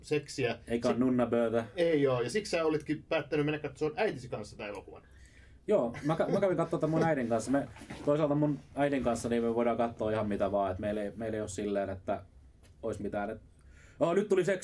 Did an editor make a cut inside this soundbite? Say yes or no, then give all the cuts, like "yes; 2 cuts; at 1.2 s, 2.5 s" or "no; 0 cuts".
no; 0 cuts